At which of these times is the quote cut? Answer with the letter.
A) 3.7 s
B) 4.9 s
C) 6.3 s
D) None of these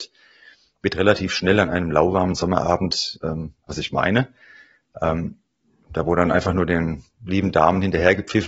A